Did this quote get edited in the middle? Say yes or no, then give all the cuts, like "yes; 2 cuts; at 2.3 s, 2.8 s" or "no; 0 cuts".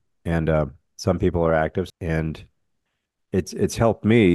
yes; 1 cut; at 1.9 s